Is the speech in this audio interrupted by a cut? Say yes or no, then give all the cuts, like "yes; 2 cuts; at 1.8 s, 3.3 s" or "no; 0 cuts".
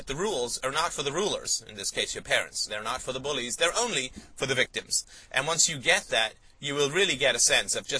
no; 0 cuts